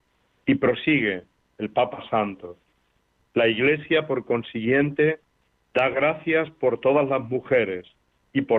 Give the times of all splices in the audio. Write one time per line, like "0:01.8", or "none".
none